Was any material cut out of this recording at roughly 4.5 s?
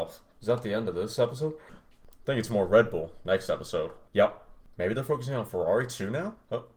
no; 1 cut; at 1.7 s

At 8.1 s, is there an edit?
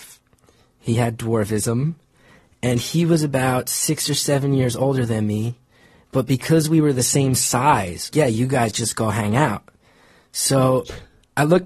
yes; 1 cut; at 8.1 s

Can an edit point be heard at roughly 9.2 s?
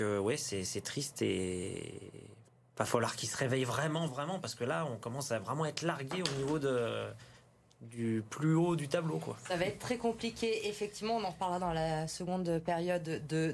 no; 1 cut; at 4.1 s

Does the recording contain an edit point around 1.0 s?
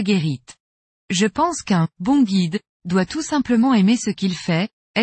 yes; 1 cut; at 1.0 s

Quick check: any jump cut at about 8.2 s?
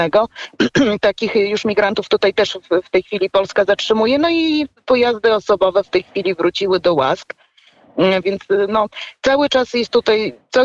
yes; 1 cut; at 8.2 s

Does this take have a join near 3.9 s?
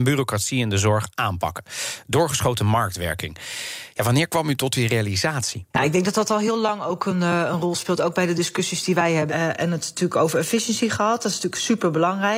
no; 2 cuts; at 5.7 s, 9.3 s

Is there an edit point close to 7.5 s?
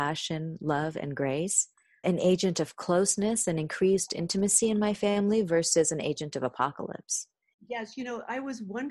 yes; 2 cuts; at 2.0 s, 7.5 s

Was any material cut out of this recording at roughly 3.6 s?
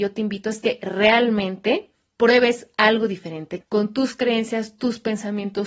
yes; 1 cut; at 3.6 s

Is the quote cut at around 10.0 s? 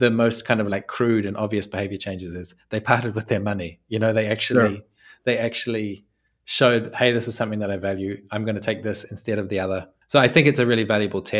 yes; 1 cut; at 10.0 s

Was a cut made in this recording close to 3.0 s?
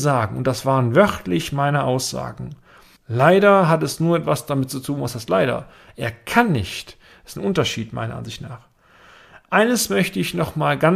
yes; 1 cut; at 3.0 s

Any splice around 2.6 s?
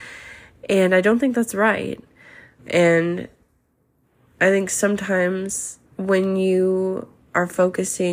yes; 2 cuts; at 2.6 s, 5.9 s

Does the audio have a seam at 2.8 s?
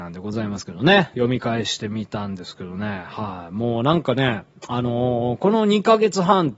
no; 1 cut; at 1.1 s

